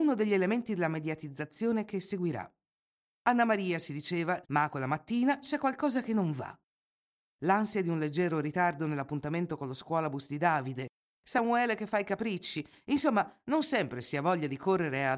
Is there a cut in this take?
yes; 1 cut; at 4.4 s

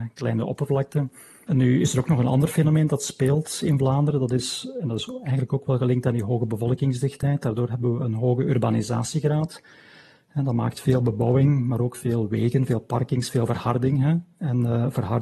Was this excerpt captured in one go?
yes; 0 cuts

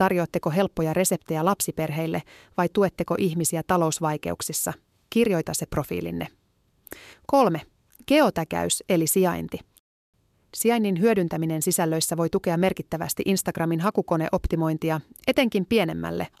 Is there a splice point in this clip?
yes; 1 cut; at 7.1 s

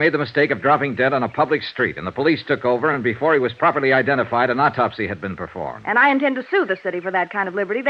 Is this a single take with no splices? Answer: yes; 0 cuts

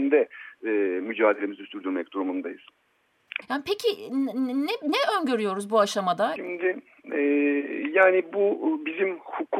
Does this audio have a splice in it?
yes; 2 cuts; at 3.4 s, 6.4 s

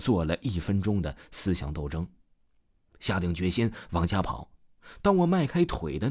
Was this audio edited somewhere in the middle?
no; 0 cuts

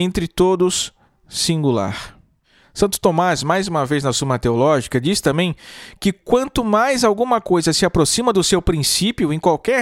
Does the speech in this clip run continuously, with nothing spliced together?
yes; 0 cuts

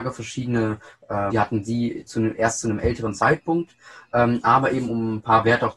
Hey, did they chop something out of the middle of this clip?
yes; 1 cut; at 1.3 s

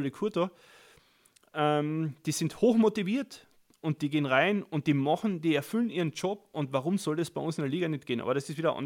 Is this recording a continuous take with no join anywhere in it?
yes; 0 cuts

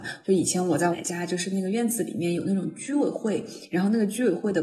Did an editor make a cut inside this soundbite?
yes; 1 cut; at 0.9 s

